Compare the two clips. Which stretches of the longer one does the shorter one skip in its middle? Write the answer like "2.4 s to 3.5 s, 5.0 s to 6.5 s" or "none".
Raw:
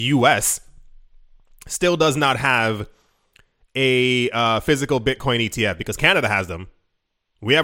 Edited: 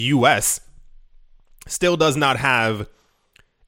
none